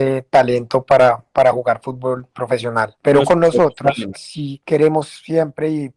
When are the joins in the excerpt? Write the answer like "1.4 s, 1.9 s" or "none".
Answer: 4.1 s